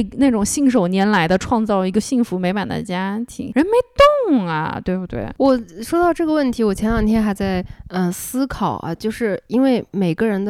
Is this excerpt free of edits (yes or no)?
yes